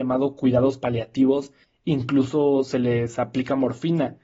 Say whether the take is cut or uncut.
cut